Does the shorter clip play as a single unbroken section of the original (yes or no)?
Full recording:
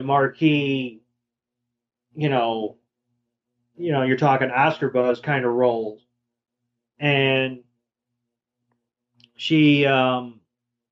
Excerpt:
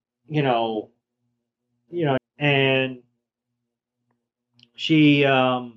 no